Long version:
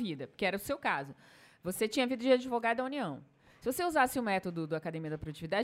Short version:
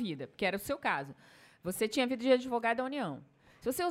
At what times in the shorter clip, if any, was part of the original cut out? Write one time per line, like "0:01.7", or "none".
none